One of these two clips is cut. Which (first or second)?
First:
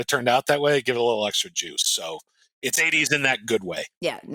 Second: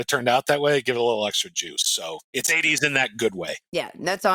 second